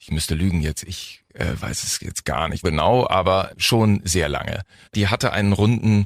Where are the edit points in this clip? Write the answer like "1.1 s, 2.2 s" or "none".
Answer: 2.6 s, 4.8 s